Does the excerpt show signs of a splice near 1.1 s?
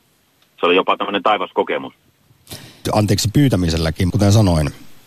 no; 2 cuts; at 2.9 s, 4.1 s

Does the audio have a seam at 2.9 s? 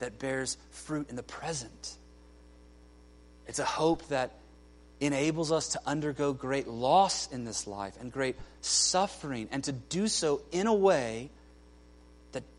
no; 0 cuts

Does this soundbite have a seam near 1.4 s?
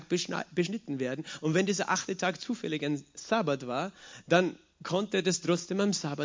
no; 0 cuts

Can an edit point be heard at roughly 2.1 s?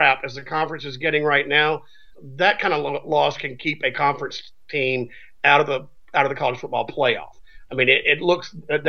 yes; 1 cut; at 2.1 s

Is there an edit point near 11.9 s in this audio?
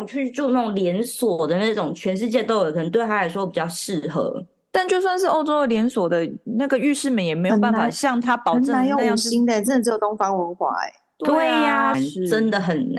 yes; 1 cut; at 11.9 s

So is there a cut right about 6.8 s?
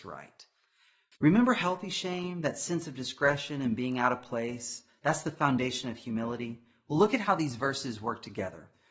no; 1 cut; at 1.1 s

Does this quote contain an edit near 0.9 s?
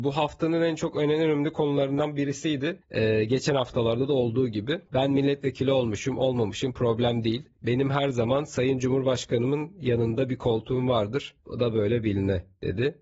no; 1 cut; at 4.9 s

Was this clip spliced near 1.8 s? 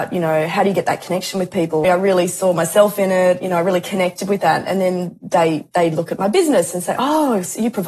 yes; 1 cut; at 1.8 s

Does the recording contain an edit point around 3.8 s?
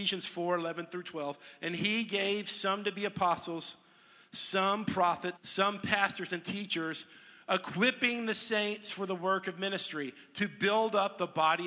no; 1 cut; at 5.4 s

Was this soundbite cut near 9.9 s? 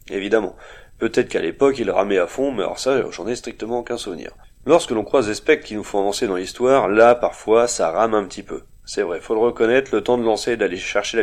no; 0 cuts

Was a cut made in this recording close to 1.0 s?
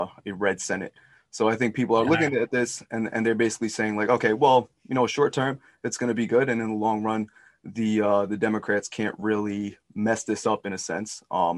no; 0 cuts

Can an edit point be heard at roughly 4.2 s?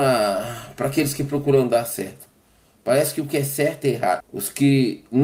yes; 1 cut; at 4.2 s

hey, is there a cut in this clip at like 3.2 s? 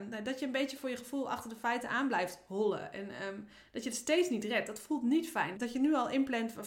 no; 1 cut; at 5.5 s

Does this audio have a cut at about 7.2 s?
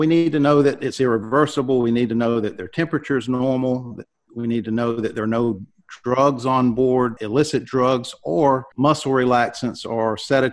yes; 2 cuts; at 7.2 s, 8.7 s

